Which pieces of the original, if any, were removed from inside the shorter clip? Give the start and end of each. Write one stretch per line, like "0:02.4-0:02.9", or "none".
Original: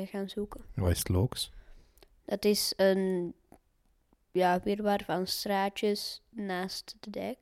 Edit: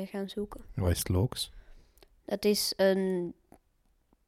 none